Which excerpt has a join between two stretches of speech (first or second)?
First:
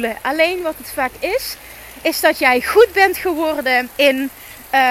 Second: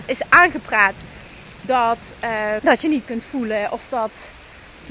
second